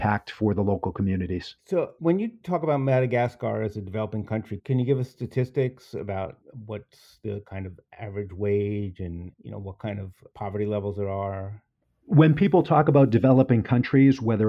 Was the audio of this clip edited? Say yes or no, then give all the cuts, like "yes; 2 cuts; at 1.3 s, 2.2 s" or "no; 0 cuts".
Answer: yes; 1 cut; at 1.6 s